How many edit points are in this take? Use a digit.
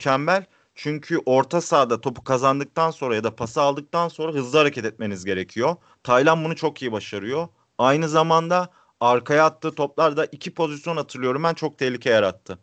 0